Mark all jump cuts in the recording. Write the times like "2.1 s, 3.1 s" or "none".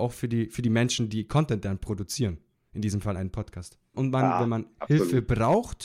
3.9 s